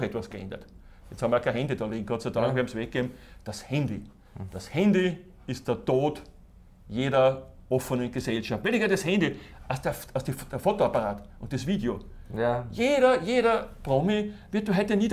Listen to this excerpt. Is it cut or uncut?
uncut